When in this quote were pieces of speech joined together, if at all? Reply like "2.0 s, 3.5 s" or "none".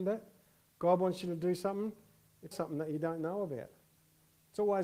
2.5 s